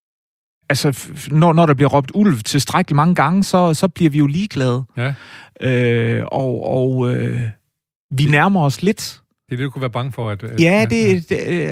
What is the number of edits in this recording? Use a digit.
0